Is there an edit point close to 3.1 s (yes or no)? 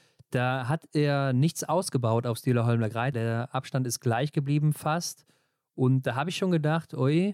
yes